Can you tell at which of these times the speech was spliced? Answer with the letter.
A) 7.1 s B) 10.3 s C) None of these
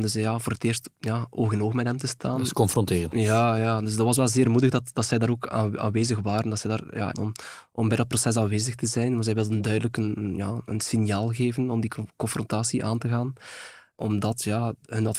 A